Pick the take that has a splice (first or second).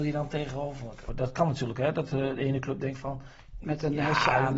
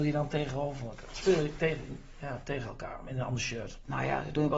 first